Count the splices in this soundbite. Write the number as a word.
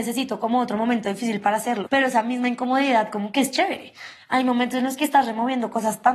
one